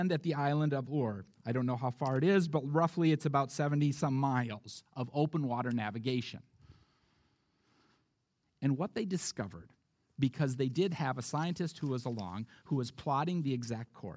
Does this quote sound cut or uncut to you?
cut